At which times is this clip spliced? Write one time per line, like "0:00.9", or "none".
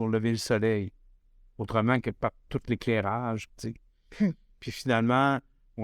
0:03.5